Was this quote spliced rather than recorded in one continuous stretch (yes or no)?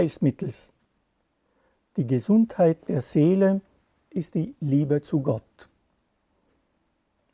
no